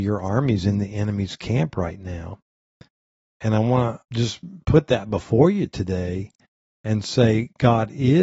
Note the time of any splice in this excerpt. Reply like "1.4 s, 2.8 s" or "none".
4.0 s